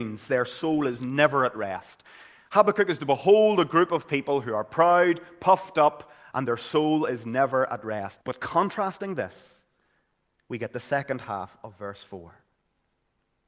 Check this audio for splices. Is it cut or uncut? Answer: cut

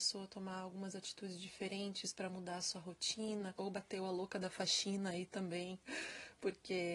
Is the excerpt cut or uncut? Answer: cut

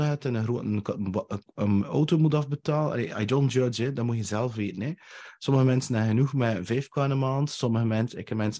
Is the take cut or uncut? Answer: uncut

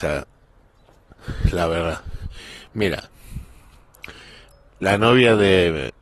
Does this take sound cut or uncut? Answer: uncut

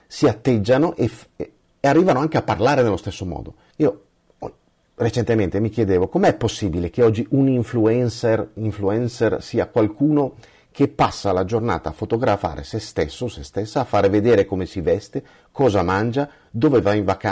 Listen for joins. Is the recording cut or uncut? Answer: cut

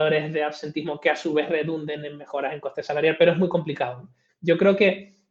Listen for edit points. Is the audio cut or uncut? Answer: cut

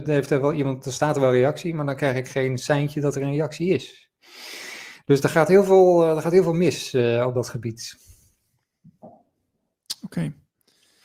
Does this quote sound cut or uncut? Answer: uncut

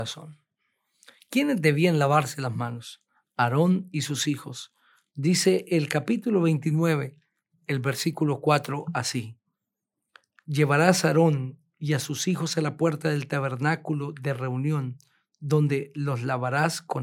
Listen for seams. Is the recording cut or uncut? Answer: uncut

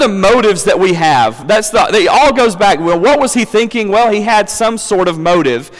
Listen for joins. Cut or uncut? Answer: uncut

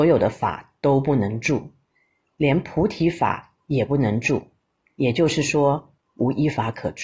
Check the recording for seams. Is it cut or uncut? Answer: cut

